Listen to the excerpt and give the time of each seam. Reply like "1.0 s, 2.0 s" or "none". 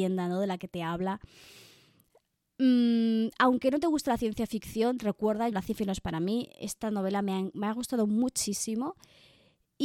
5.5 s

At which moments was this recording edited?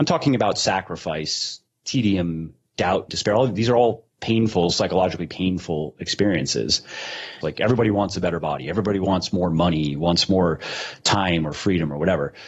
3.1 s, 7.4 s

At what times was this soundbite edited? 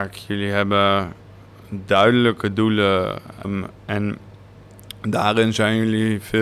3.4 s

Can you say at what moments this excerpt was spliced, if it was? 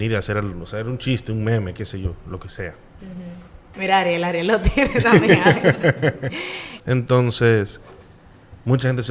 3.7 s, 6.8 s

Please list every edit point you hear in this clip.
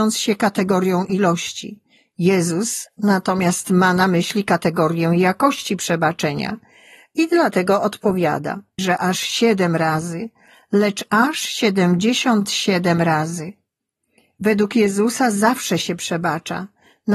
8.8 s

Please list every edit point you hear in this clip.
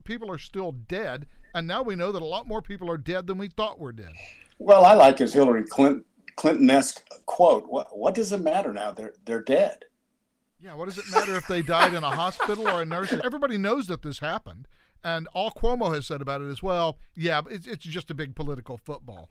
13.2 s

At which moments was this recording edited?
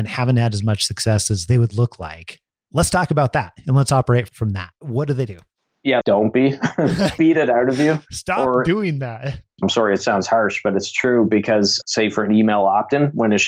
6.0 s, 9.6 s, 11.8 s

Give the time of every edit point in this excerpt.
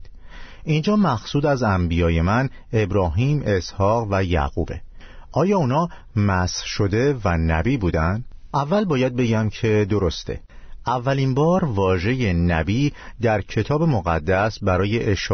8.5 s

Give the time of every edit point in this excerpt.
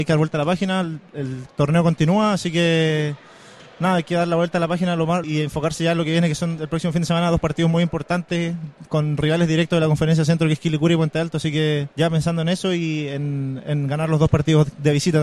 5.2 s, 11.9 s

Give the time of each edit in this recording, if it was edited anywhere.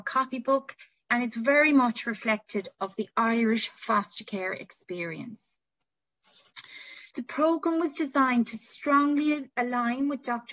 1.1 s, 7.1 s

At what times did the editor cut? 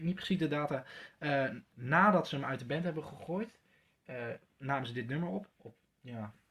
1.7 s, 5.5 s

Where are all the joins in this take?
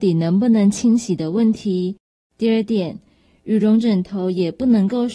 2.2 s

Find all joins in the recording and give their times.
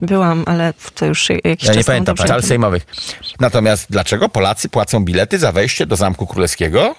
2.3 s, 3.3 s

